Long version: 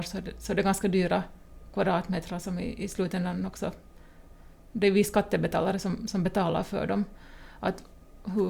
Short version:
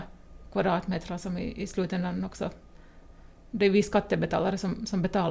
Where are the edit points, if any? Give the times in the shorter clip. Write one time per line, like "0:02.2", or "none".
none